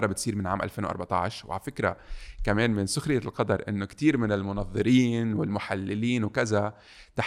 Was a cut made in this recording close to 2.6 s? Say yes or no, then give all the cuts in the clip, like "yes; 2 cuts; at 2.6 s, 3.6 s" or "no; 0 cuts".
no; 0 cuts